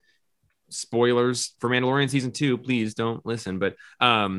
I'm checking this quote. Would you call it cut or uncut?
uncut